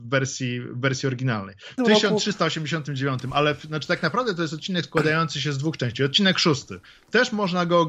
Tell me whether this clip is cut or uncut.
cut